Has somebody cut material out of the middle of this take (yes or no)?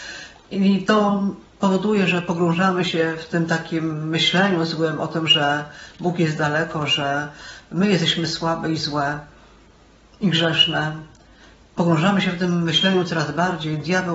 no